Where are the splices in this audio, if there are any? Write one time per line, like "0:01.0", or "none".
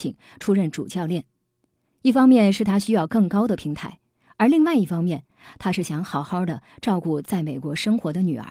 none